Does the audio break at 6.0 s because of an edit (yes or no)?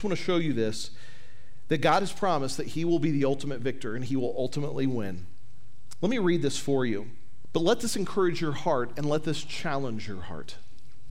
no